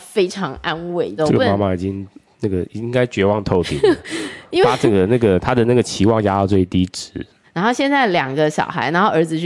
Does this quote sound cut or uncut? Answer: cut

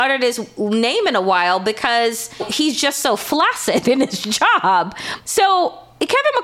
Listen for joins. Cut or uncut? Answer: cut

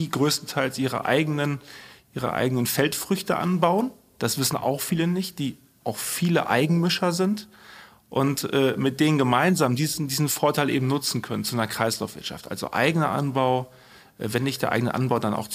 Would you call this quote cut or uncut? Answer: uncut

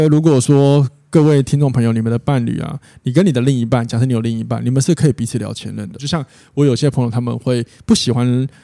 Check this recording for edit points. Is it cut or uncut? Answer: cut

